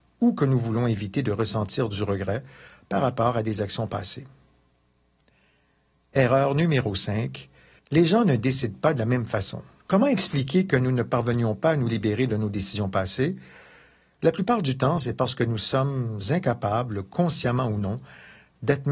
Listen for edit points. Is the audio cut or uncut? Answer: cut